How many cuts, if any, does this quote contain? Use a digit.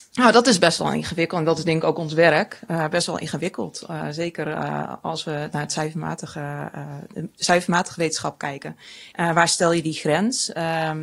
1